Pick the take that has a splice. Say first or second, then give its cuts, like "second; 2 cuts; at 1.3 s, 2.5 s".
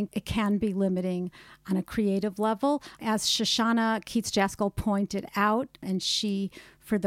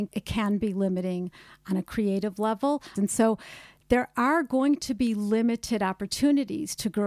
second; 1 cut; at 3.0 s